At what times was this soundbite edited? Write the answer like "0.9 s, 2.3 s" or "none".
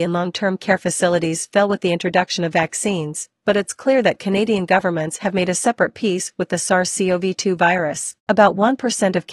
8.2 s